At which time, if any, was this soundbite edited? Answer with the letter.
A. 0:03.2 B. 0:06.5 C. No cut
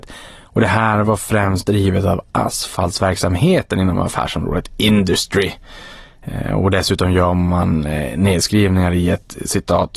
C